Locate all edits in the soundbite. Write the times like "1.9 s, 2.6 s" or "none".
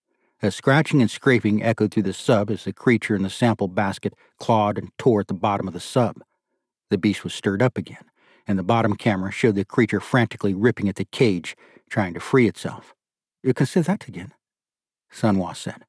13.3 s